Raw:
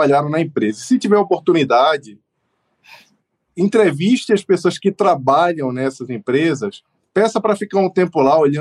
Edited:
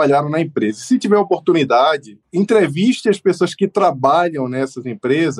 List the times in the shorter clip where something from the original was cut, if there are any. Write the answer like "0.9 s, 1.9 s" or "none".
2.2 s